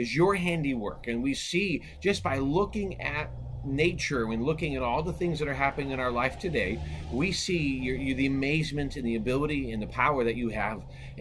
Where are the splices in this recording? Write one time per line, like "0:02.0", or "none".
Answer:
none